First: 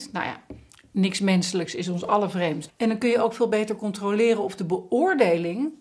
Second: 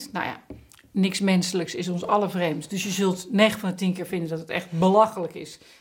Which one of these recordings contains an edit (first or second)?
first